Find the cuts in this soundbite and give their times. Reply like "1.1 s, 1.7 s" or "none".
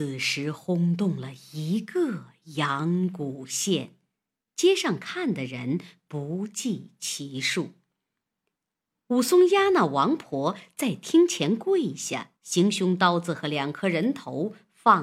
8.9 s, 12.4 s